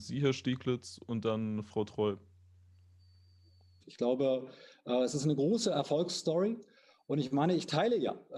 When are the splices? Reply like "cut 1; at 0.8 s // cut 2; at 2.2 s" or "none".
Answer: cut 1; at 3.8 s